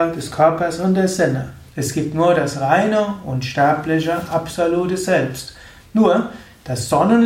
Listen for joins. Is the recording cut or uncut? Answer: cut